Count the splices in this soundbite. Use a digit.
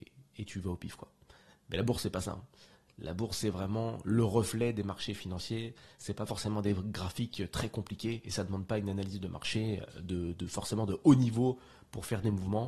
0